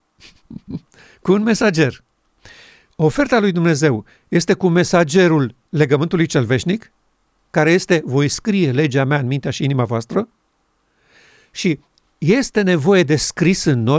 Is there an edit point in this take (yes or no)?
no